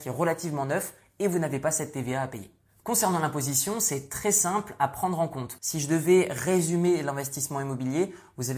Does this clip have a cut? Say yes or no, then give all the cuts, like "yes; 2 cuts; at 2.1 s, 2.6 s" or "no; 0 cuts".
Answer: yes; 1 cut; at 5.6 s